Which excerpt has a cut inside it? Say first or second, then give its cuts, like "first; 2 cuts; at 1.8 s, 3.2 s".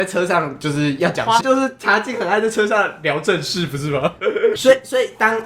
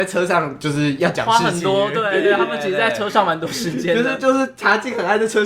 first; 2 cuts; at 1.4 s, 4.6 s